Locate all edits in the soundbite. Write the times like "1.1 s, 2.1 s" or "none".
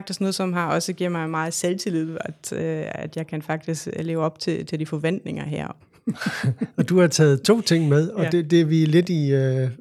5.8 s